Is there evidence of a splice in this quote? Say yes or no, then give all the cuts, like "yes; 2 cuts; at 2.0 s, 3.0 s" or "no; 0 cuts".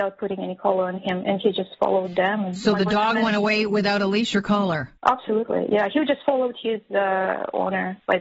yes; 1 cut; at 5.0 s